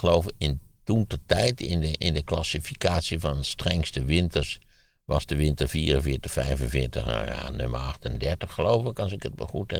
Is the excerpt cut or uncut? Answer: uncut